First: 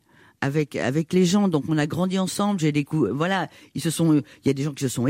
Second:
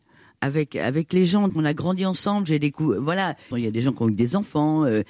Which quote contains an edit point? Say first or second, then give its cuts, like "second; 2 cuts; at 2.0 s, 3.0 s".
second; 2 cuts; at 1.5 s, 3.5 s